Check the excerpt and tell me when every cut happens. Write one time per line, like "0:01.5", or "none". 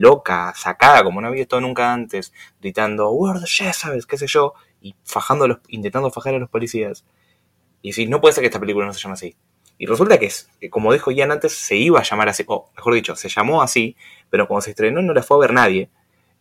none